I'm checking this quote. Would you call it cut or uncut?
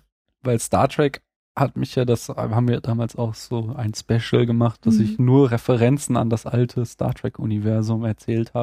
uncut